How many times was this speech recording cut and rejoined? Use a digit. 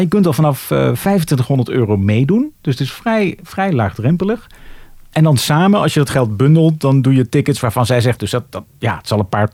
1